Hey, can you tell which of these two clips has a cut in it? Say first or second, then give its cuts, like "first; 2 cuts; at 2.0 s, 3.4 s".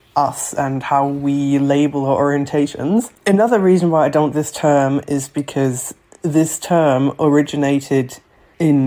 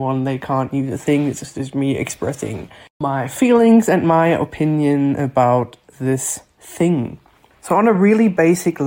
first; 2 cuts; at 3.2 s, 4.3 s